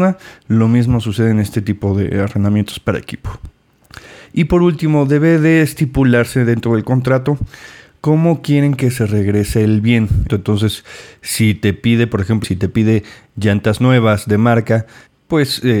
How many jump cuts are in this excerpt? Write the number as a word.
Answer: two